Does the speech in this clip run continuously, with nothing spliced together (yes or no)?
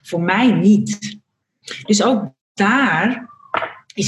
no